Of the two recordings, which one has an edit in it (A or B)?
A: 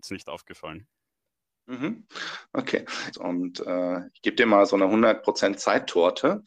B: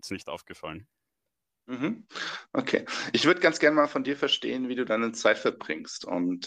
A